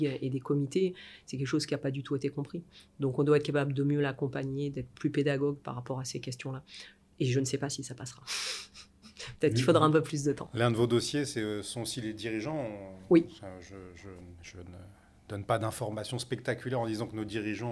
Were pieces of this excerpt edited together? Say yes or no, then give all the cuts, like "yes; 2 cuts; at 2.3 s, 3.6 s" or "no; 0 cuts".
no; 0 cuts